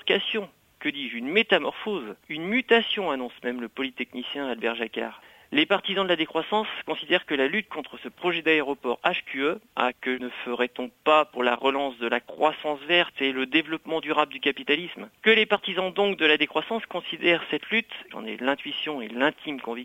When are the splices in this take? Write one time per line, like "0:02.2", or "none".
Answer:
0:09.9
0:18.1